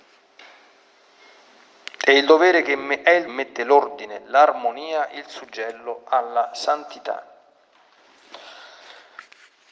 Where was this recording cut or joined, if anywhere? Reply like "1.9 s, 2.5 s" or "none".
3.3 s